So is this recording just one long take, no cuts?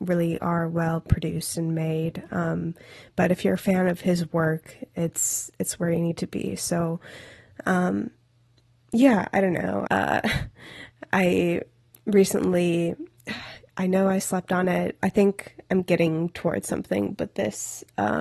no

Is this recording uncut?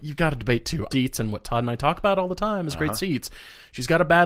no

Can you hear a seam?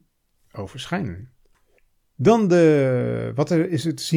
no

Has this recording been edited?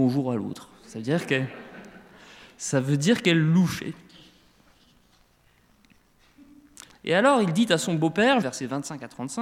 yes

